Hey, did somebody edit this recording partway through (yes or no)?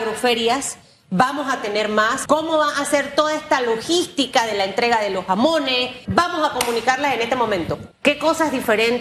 yes